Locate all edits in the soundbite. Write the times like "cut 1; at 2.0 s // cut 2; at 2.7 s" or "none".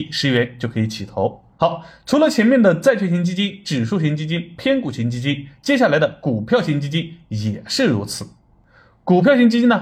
cut 1; at 1.5 s